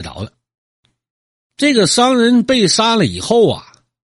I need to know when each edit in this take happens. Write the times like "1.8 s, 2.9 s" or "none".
1.4 s

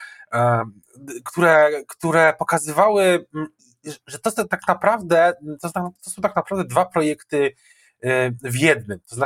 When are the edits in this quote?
none

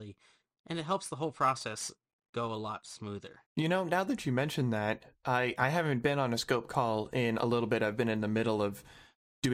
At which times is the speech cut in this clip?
3.5 s

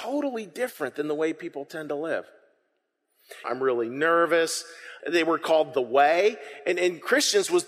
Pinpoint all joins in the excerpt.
3.4 s, 5.0 s

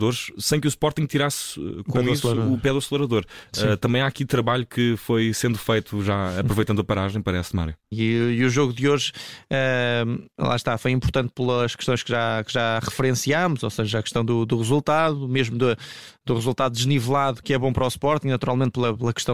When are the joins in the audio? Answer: 7.9 s

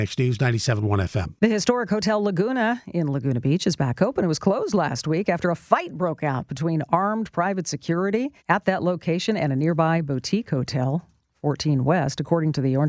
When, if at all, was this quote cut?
8.4 s

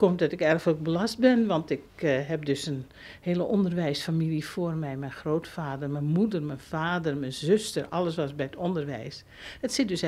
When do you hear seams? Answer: none

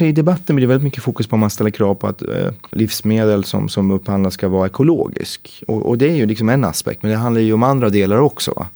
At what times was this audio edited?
none

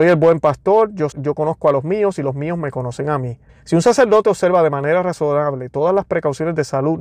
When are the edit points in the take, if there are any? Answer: 1.1 s, 3.5 s

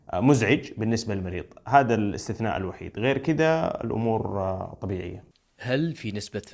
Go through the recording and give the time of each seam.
none

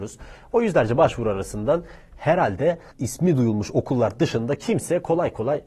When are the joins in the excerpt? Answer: none

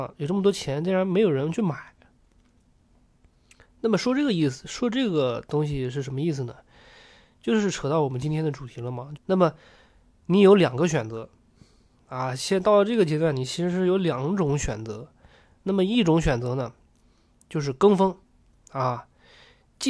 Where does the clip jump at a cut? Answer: 9.2 s

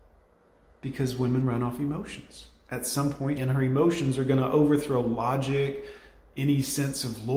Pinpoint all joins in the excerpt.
3.4 s

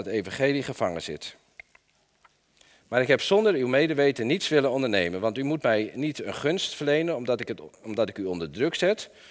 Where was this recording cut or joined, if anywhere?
none

